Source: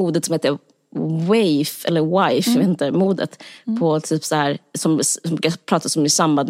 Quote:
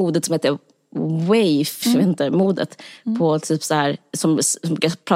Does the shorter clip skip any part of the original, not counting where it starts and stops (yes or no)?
yes